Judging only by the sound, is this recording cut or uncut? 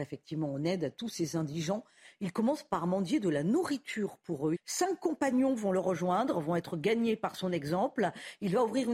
cut